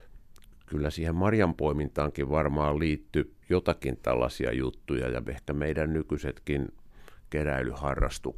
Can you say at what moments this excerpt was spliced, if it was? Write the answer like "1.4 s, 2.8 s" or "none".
3.4 s